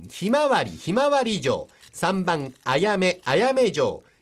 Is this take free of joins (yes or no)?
no